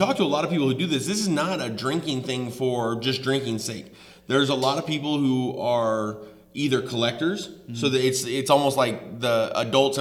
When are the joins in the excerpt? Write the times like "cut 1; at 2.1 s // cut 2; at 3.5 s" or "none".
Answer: none